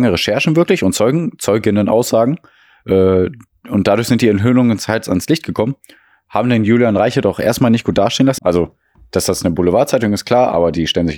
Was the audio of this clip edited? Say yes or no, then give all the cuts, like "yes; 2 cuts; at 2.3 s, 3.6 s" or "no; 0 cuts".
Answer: yes; 1 cut; at 8.4 s